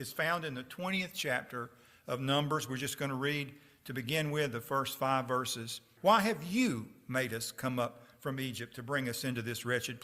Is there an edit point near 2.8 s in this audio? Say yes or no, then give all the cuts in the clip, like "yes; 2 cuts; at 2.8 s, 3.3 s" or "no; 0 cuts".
no; 1 cut; at 6.0 s